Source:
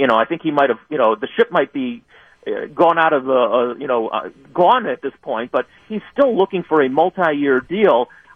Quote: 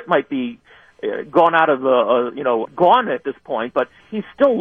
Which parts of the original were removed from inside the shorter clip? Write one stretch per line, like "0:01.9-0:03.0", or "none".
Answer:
0:04.1-0:04.4